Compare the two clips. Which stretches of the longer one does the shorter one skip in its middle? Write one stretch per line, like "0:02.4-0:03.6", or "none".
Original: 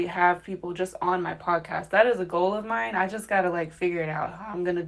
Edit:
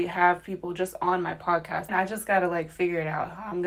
0:01.9-0:02.9